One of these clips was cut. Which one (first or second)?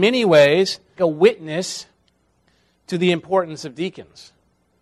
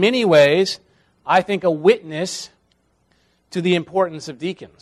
first